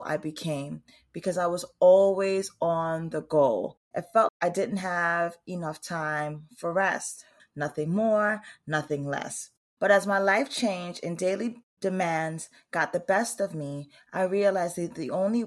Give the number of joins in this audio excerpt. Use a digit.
2